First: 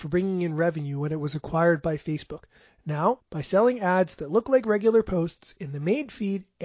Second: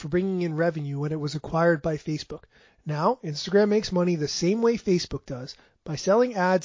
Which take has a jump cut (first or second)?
first